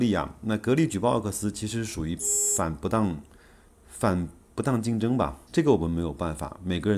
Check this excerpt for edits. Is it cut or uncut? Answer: cut